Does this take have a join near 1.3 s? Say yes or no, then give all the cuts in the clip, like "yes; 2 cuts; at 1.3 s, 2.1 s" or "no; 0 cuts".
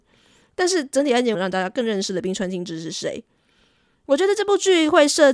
yes; 1 cut; at 1.3 s